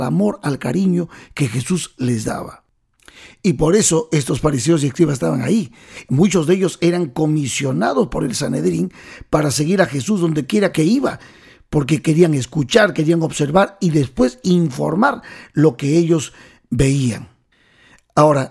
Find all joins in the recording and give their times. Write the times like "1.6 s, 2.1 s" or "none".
10.7 s